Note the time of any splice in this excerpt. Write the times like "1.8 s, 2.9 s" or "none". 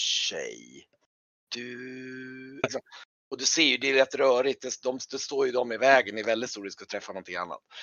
2.6 s